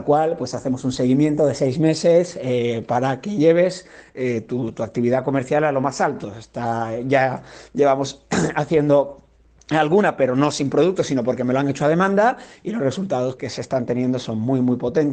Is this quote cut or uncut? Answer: cut